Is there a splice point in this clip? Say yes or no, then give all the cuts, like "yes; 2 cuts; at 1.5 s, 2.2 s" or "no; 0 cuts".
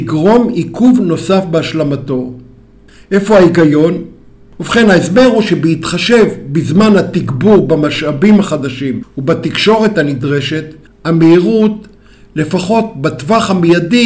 no; 0 cuts